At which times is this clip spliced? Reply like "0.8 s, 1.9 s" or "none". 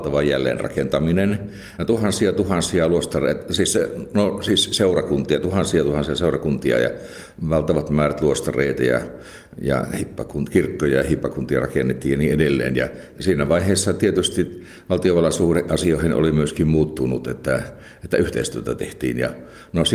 none